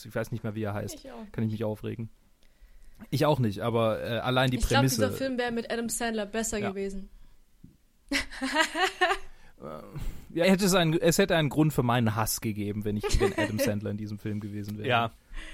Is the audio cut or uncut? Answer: cut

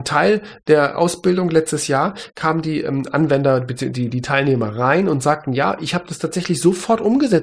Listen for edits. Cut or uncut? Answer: uncut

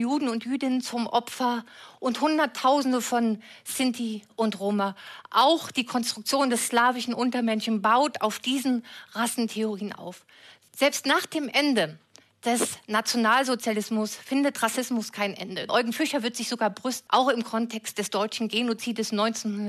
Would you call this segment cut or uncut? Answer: cut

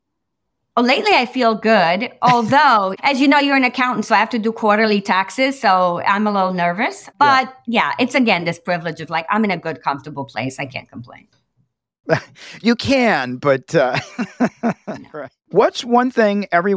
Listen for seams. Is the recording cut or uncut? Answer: uncut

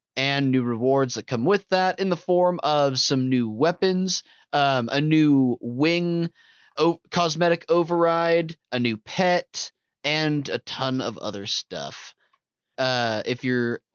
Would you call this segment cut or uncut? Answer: cut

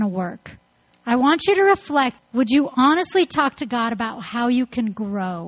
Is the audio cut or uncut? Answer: cut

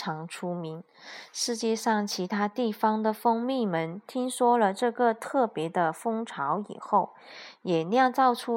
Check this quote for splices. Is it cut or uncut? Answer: uncut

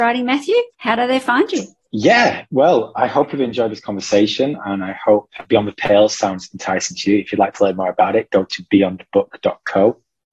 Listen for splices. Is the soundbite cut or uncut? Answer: uncut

